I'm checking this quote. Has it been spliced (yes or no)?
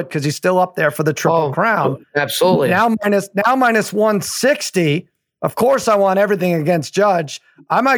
no